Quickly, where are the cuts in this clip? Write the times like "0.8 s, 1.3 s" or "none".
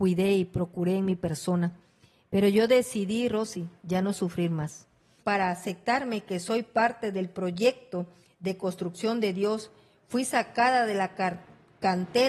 5.2 s